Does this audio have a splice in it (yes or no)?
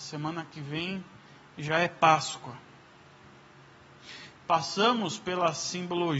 yes